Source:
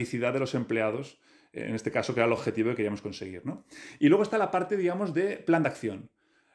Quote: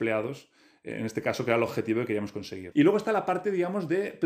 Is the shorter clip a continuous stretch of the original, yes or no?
no